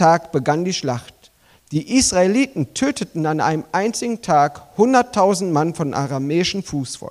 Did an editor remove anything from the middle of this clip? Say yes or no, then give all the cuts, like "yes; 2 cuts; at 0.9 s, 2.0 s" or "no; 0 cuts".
no; 0 cuts